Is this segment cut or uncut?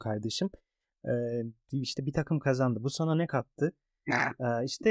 uncut